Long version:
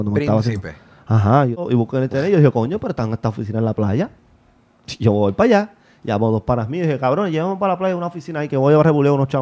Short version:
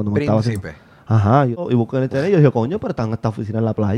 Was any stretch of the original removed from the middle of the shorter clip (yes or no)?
no